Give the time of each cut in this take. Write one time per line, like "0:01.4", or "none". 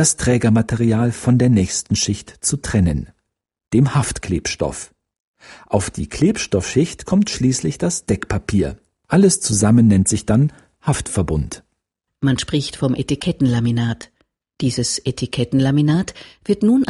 0:12.1